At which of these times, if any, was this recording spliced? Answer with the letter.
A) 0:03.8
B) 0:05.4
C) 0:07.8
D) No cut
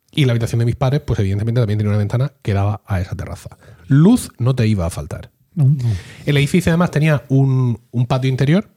D